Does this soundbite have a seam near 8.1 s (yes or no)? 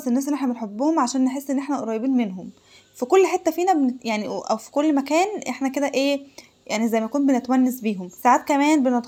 yes